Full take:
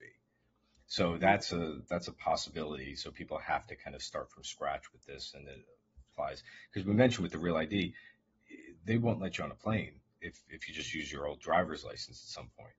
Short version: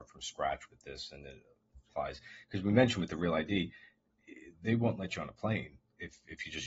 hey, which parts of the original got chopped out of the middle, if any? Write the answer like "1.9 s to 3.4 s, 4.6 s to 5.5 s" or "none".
none